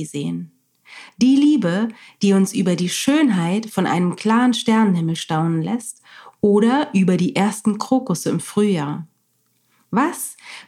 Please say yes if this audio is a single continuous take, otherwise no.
yes